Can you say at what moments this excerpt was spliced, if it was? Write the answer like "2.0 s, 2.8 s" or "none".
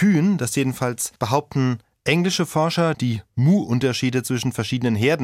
1.2 s, 2.9 s